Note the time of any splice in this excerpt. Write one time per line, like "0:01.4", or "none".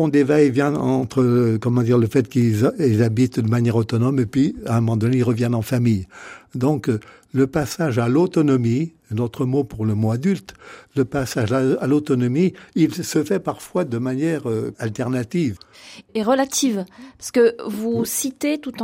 none

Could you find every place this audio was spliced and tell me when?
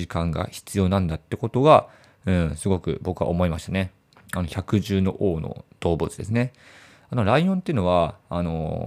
0:04.2

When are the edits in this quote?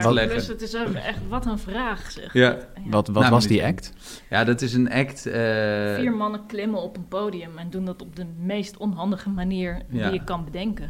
none

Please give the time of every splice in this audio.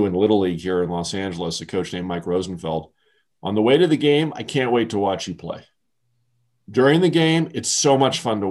0:03.3

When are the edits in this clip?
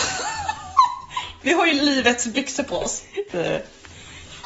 0:01.4
0:03.3

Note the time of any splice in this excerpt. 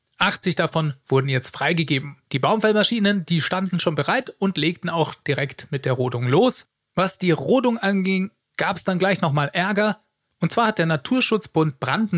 0:02.2

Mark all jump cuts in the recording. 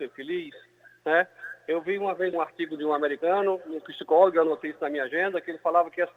0:02.3

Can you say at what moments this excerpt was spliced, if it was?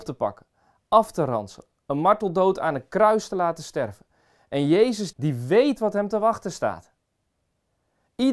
0:05.1

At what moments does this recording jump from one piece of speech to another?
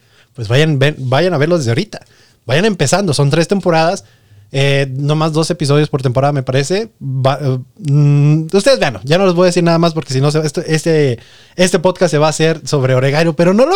none

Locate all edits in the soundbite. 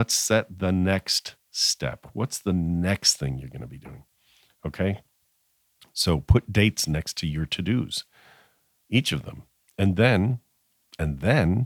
none

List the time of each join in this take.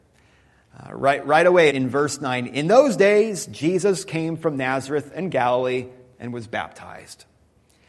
0:01.7

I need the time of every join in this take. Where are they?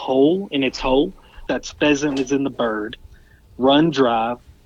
0:01.5

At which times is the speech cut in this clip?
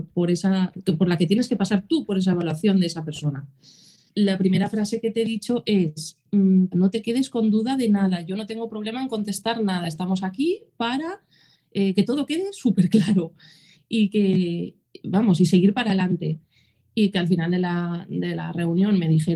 0:04.1
0:06.7

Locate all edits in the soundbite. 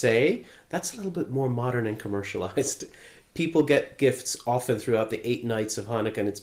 none

